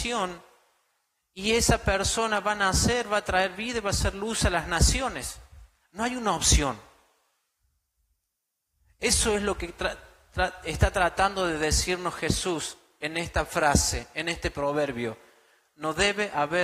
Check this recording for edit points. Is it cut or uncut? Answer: uncut